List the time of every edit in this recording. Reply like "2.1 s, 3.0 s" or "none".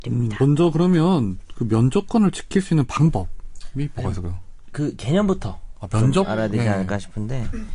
none